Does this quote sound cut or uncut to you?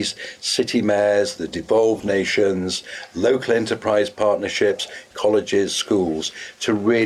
cut